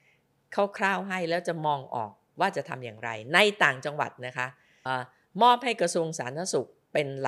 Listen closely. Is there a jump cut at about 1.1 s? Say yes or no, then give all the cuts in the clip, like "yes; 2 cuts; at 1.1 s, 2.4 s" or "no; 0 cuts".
no; 1 cut; at 4.9 s